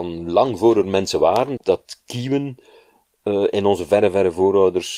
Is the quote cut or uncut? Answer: cut